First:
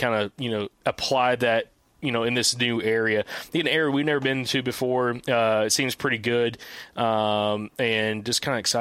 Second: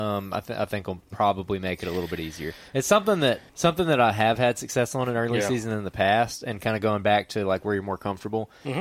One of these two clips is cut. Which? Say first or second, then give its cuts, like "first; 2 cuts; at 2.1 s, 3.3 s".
second; 1 cut; at 3.5 s